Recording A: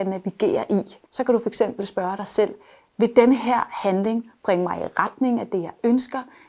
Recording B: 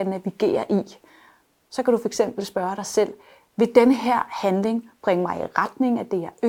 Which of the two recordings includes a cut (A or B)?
A